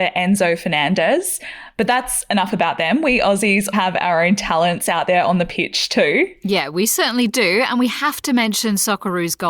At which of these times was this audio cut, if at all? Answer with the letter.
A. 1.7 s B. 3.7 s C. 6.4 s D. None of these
B